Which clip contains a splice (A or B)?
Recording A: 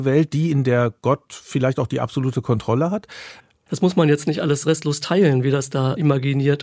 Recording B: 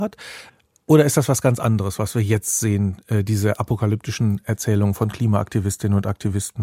A